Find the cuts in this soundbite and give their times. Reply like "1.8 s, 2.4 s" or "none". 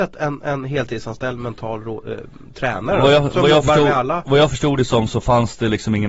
none